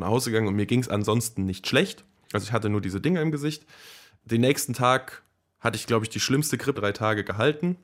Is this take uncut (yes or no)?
no